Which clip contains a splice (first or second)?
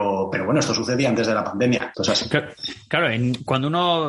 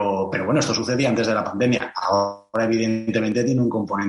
first